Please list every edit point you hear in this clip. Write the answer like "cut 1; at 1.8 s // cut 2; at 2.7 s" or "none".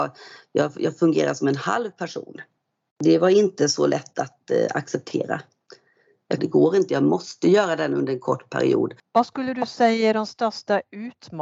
cut 1; at 6.4 s // cut 2; at 9.0 s